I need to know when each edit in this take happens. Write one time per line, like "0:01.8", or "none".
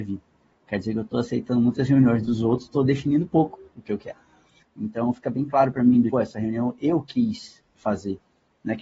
0:04.6
0:06.1